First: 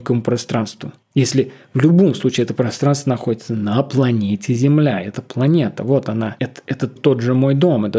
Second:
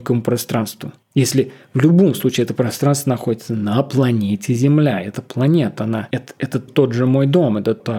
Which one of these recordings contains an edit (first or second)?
second